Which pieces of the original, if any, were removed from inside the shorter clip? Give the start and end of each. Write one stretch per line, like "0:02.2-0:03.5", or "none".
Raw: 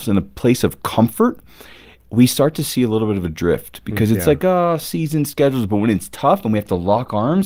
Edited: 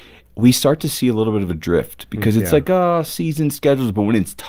none